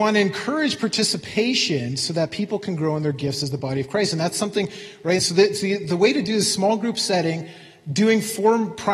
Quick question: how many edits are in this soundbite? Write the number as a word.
one